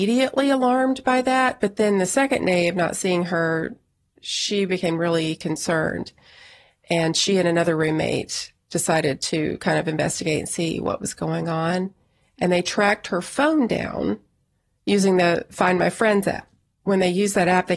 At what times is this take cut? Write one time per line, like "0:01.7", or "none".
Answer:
none